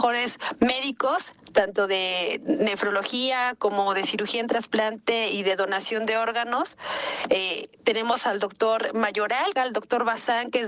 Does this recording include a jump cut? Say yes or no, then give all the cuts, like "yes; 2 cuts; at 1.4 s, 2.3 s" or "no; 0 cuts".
yes; 1 cut; at 9.5 s